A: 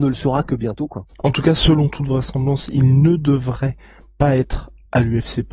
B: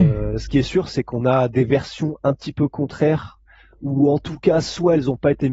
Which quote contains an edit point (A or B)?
A